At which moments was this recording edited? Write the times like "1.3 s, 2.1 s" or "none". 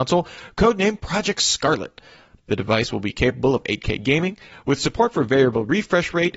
2.4 s, 4.5 s

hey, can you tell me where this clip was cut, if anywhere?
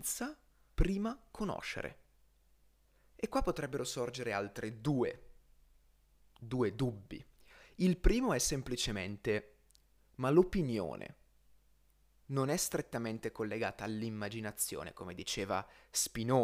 none

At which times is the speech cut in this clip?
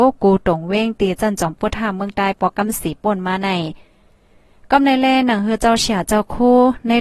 none

